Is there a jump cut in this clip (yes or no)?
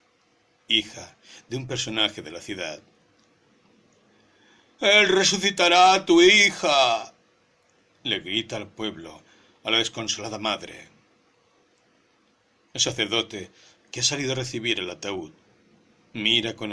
no